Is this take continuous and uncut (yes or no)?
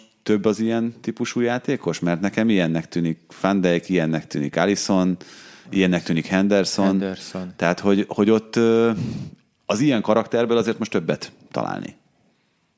yes